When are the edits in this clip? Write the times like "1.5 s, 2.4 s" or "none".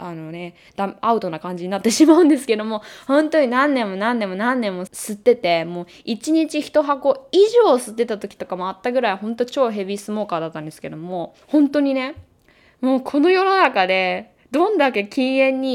4.9 s, 11.4 s